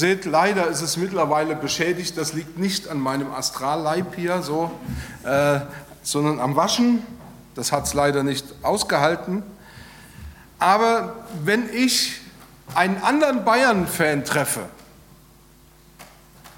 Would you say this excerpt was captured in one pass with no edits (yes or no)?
yes